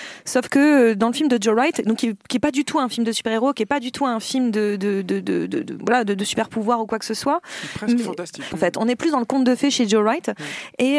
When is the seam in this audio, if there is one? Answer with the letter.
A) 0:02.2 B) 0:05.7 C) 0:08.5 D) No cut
C